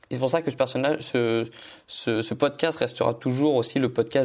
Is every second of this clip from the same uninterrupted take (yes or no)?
yes